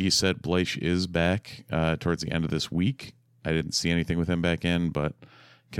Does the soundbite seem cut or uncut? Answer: uncut